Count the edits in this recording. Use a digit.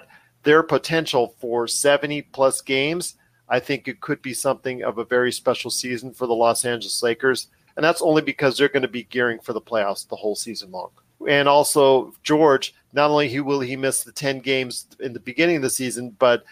2